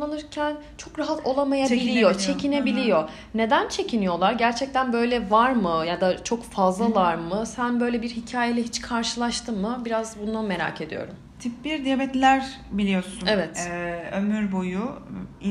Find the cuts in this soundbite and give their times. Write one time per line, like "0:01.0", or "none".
none